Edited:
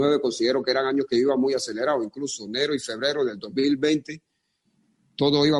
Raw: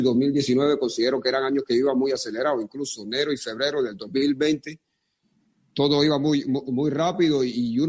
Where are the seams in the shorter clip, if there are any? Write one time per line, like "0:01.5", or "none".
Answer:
none